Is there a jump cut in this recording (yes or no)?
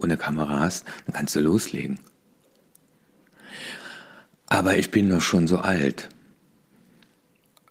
no